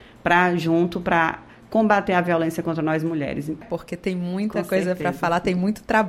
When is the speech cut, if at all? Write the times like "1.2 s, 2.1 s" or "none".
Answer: 3.6 s